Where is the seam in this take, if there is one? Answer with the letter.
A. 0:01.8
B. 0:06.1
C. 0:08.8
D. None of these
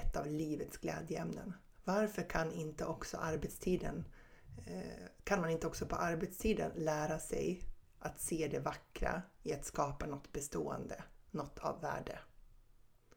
A